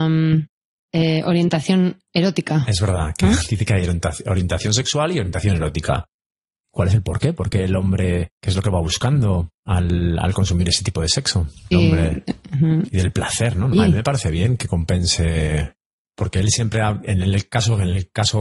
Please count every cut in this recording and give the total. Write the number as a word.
three